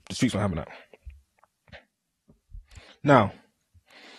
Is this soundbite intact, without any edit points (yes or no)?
yes